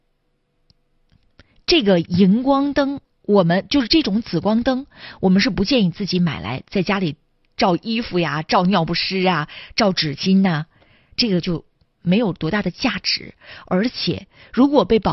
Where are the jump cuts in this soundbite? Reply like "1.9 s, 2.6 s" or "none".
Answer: none